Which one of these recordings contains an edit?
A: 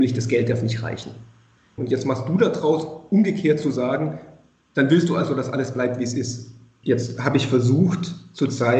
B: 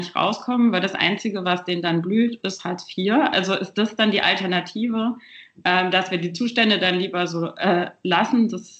A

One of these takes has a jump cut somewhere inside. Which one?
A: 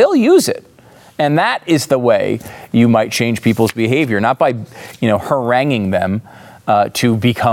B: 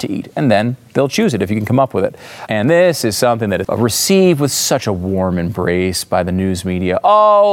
B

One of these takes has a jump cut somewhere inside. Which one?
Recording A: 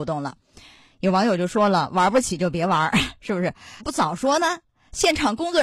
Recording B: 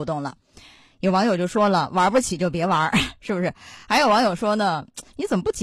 A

